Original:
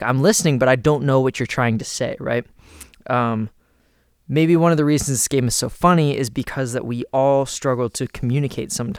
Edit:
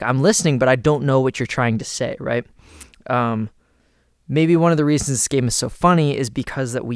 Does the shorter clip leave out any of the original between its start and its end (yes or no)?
no